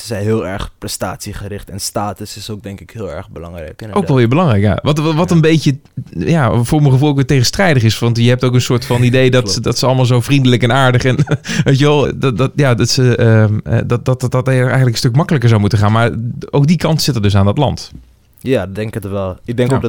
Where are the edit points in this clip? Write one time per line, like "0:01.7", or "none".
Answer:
0:12.0